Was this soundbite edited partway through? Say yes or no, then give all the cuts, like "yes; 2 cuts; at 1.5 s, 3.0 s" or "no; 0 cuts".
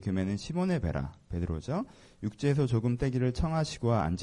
no; 0 cuts